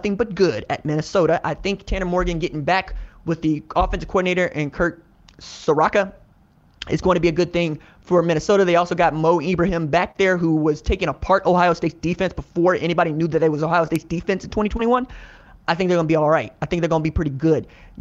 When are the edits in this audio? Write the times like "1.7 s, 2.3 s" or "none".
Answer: none